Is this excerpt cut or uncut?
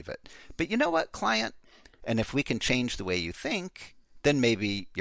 cut